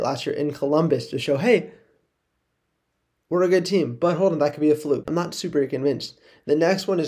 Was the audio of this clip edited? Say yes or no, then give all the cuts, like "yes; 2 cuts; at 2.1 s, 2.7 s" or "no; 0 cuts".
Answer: yes; 1 cut; at 5.0 s